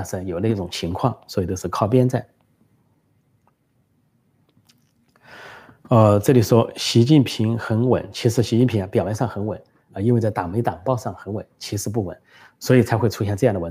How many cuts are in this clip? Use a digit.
0